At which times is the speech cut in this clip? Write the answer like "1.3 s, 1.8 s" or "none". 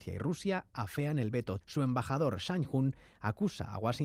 1.6 s